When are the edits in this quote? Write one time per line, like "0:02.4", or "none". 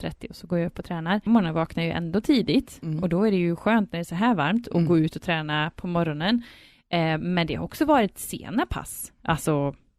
0:01.3